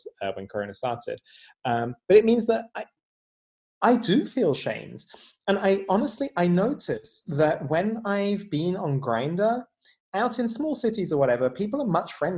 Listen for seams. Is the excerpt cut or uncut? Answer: uncut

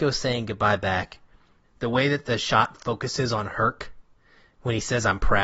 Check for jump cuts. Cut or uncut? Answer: cut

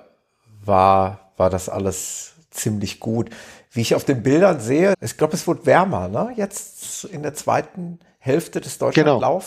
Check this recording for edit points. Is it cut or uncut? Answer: cut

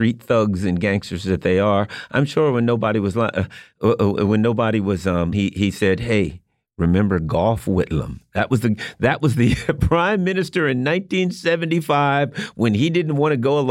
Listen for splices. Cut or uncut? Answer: cut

